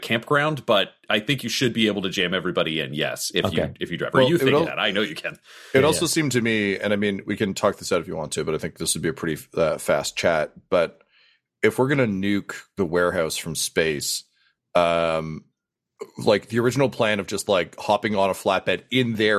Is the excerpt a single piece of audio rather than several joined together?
yes; 0 cuts

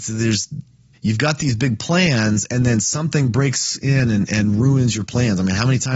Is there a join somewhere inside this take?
yes; 1 cut; at 0.9 s

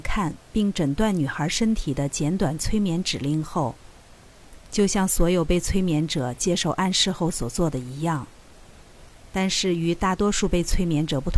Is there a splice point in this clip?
yes; 1 cut; at 4.6 s

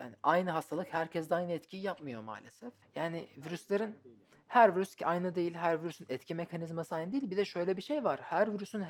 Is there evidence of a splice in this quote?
yes; 1 cut; at 2.8 s

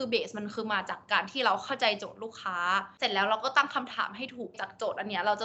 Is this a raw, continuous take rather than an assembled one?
yes; 0 cuts

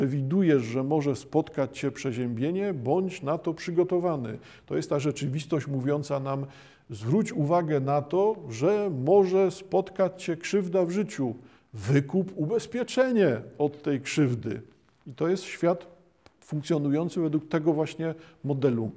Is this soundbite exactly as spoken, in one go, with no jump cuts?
yes; 0 cuts

